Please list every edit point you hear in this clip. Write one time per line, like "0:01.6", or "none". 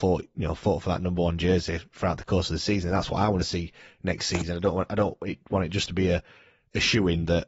none